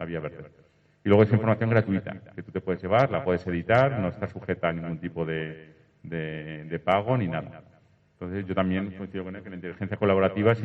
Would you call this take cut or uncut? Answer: uncut